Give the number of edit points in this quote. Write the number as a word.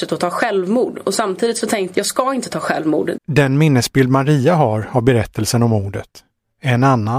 two